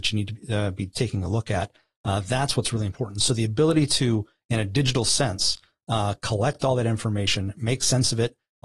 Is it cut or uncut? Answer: uncut